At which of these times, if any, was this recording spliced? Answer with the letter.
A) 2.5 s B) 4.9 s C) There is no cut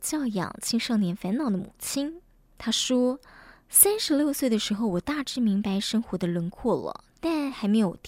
A